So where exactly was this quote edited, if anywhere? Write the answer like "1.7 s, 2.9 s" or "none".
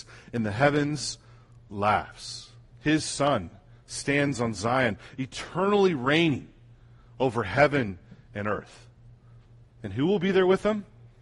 2.7 s